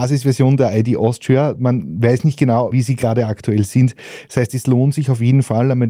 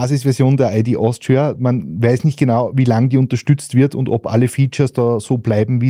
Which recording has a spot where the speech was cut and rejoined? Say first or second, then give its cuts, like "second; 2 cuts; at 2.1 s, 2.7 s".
first; 1 cut; at 2.7 s